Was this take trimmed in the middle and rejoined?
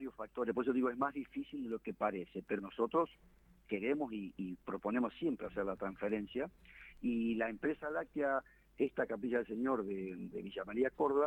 yes; 2 cuts; at 2.6 s, 10.3 s

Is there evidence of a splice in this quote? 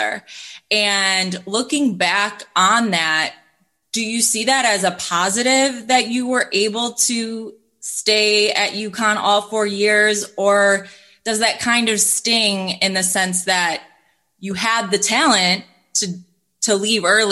no; 0 cuts

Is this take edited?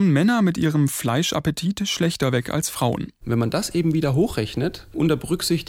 yes; 1 cut; at 3.2 s

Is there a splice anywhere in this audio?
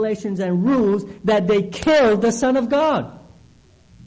no; 0 cuts

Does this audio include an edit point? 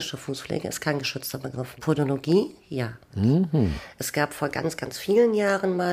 no; 0 cuts

